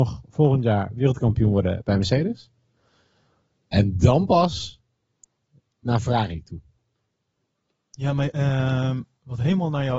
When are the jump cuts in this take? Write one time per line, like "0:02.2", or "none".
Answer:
0:08.3